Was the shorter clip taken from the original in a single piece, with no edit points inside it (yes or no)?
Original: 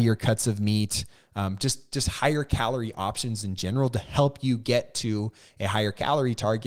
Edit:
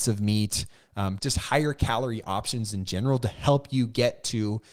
no